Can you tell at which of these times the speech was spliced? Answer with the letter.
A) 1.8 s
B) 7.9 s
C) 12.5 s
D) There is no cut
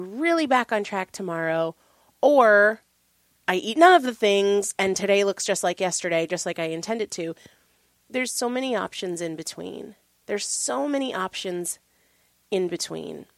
D